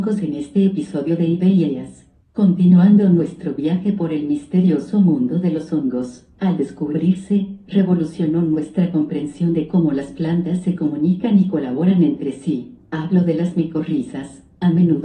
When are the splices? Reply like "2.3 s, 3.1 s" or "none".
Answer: 2.2 s, 6.3 s